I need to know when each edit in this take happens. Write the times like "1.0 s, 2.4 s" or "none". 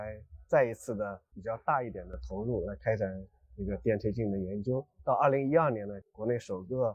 none